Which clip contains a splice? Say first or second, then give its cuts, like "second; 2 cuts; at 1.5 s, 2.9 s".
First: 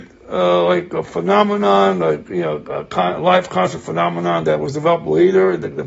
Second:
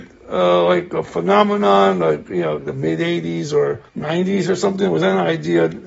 second; 2 cuts; at 2.6 s, 3.9 s